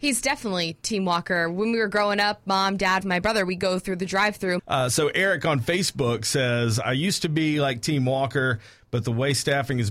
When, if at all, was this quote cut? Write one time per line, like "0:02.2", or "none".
0:03.0
0:04.6

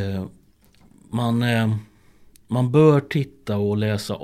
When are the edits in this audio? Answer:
none

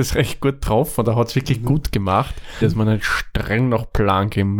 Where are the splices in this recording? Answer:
0:02.6

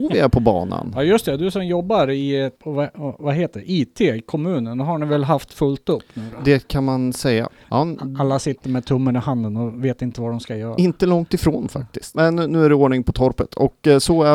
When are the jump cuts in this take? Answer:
0:02.6
0:07.6
0:12.1

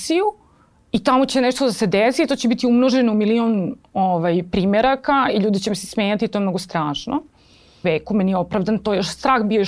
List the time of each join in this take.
0:07.8

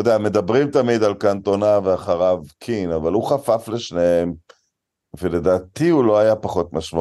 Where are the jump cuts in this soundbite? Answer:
none

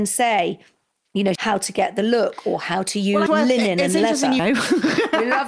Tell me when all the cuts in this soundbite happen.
0:01.4
0:03.3
0:04.4

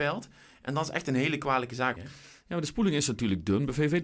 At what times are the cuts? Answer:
0:02.0

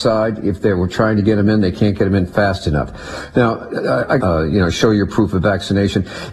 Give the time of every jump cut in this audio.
0:04.2

